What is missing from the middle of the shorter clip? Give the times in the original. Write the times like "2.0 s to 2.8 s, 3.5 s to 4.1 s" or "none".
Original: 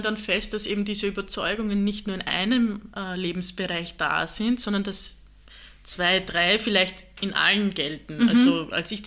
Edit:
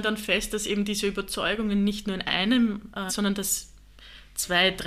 3.1 s to 4.6 s